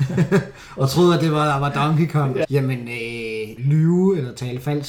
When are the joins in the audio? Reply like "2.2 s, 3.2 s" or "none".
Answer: 2.4 s, 3.6 s